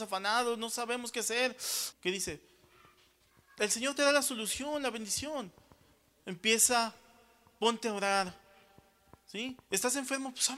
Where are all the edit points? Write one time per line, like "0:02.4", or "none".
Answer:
0:01.9